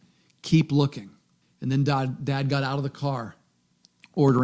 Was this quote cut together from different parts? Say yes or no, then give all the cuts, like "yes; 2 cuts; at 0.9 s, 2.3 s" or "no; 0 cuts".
yes; 1 cut; at 1.4 s